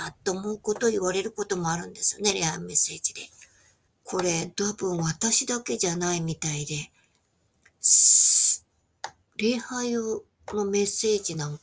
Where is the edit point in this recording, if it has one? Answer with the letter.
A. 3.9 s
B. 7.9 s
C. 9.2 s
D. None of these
A